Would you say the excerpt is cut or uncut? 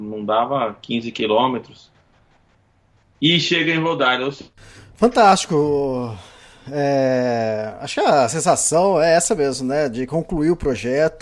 uncut